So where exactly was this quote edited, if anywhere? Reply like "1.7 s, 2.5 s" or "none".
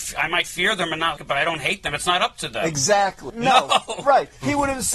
1.2 s, 3.3 s

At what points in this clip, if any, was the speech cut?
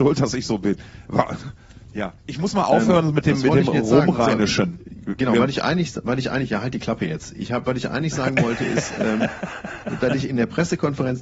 none

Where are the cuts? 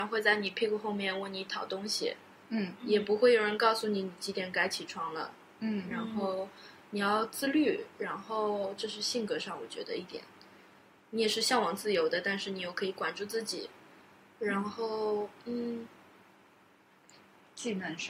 none

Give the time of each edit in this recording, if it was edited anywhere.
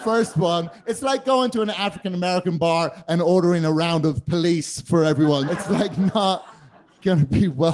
5.5 s

